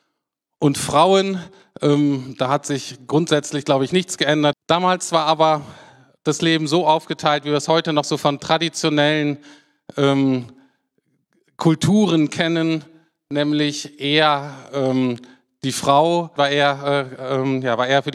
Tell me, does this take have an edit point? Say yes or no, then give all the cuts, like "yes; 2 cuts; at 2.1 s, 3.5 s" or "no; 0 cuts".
yes; 2 cuts; at 4.5 s, 16.4 s